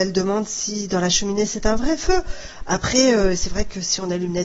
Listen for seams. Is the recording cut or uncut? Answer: uncut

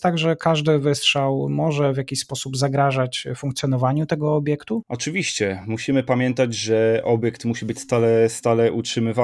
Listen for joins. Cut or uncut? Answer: uncut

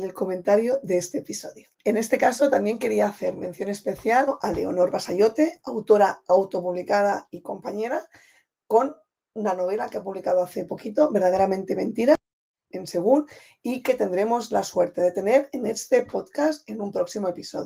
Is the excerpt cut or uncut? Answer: cut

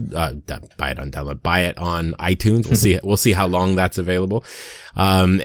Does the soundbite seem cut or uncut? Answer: cut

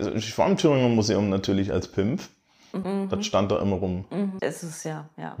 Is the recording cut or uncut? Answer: cut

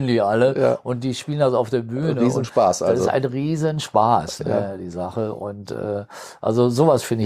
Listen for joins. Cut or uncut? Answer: uncut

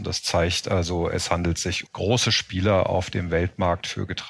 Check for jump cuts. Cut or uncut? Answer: cut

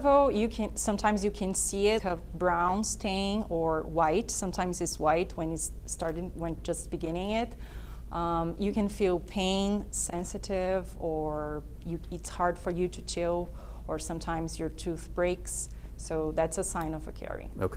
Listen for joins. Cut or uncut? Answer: cut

